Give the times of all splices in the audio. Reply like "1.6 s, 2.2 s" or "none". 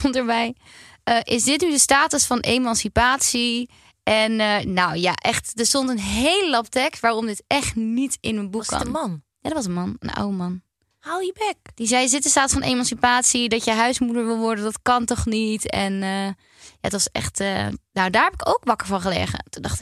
none